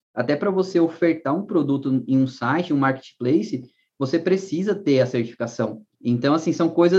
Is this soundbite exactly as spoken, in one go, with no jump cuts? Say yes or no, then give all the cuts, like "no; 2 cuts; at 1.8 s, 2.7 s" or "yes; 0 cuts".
no; 1 cut; at 5.9 s